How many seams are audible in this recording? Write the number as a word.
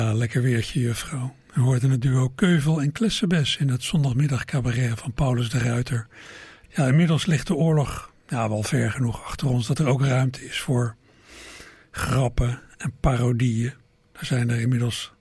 one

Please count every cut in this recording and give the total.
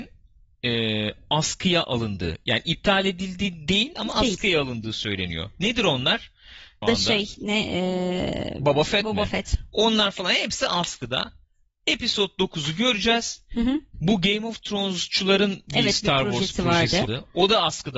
three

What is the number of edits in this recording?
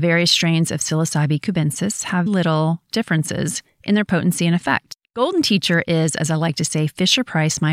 one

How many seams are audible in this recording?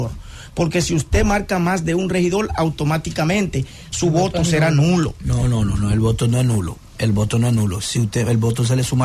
zero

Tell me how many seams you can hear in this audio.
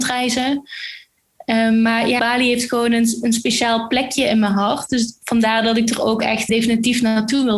two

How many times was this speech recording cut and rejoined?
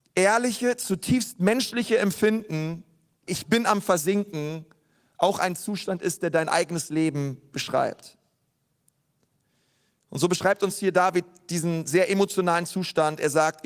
one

